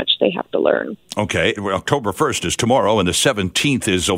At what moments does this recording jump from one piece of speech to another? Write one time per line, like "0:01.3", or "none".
0:01.6